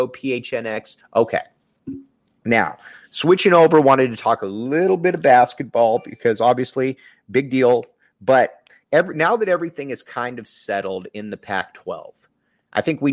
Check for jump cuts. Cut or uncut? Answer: cut